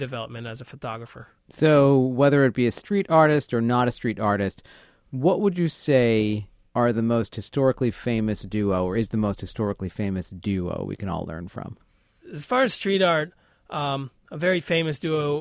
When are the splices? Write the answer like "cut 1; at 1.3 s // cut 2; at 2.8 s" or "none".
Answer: cut 1; at 1.4 s